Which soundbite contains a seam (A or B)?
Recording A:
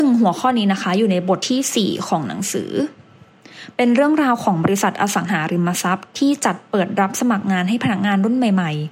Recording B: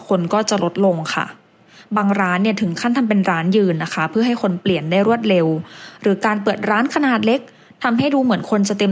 A